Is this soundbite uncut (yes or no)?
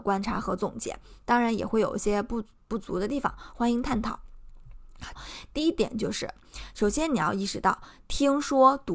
no